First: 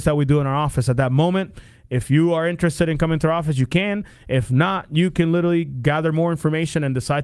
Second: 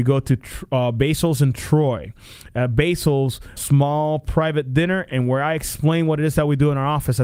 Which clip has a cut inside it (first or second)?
second